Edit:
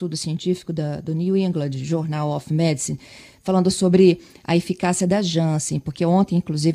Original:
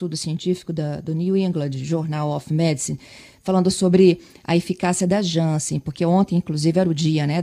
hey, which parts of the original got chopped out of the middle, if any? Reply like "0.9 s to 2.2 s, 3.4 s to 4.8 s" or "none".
none